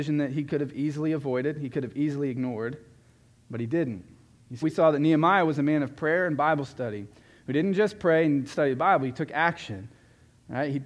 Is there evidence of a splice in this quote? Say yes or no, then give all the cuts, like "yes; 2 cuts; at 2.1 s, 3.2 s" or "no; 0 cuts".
yes; 1 cut; at 4.6 s